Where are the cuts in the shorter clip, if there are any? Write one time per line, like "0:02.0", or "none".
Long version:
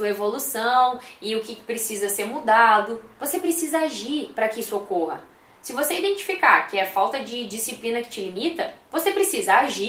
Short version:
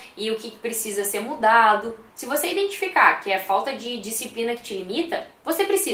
0:02.1

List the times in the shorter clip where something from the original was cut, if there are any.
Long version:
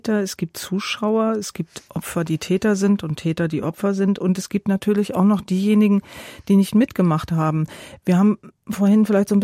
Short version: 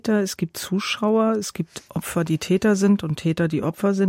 none

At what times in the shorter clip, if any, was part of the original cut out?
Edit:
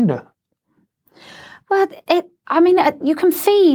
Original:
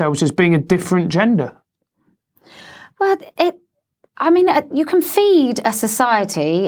0:02.4

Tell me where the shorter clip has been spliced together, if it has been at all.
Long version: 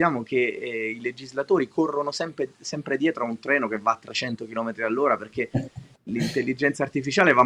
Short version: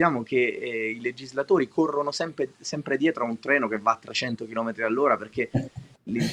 none

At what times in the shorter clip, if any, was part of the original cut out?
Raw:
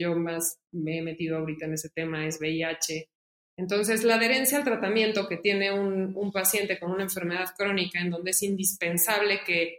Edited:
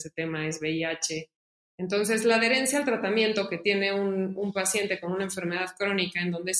none

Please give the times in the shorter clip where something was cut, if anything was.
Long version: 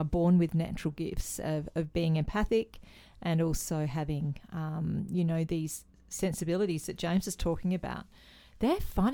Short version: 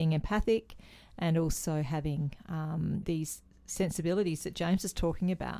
0:03.0

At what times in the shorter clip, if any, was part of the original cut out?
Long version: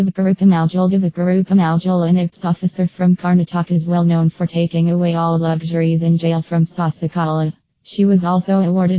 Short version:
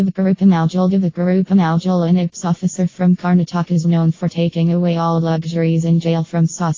0:03.8

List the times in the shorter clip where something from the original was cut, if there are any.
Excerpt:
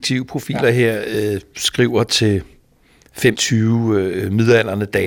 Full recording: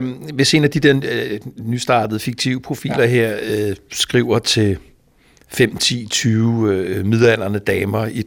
0:03.4

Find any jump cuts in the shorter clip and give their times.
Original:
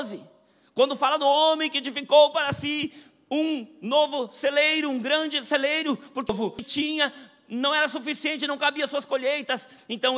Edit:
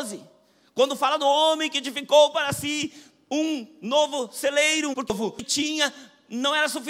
0:04.9

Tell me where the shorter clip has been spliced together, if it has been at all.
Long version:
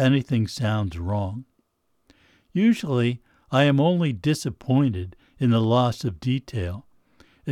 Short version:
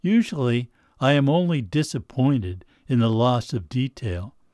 none

